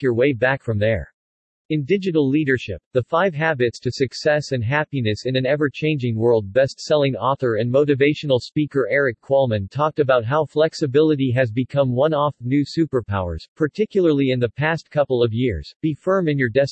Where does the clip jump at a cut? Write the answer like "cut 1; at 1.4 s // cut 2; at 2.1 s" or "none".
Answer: cut 1; at 1.6 s